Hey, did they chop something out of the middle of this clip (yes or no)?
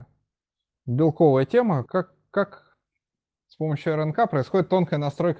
yes